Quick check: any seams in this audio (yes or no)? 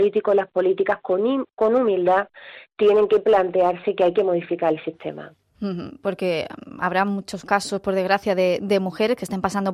no